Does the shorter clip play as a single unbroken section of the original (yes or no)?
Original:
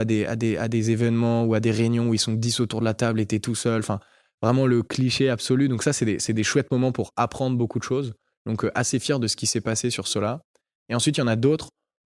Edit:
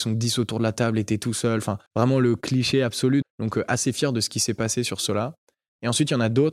no